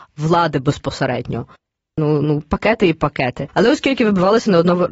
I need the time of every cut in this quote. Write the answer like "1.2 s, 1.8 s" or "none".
2.0 s